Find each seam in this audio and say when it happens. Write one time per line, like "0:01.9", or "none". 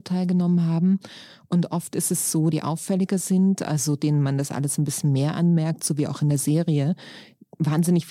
0:02.5